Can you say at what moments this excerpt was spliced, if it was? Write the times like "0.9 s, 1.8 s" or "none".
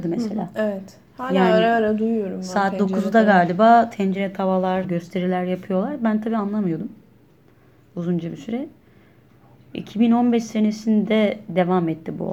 4.8 s